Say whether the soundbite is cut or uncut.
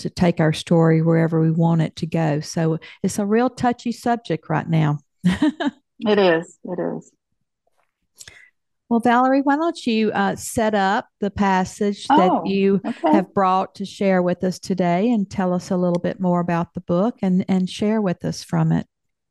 uncut